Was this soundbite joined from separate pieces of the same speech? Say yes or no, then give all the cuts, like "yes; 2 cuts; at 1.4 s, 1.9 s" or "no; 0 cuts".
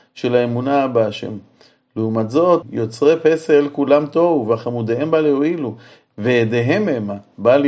yes; 1 cut; at 2.6 s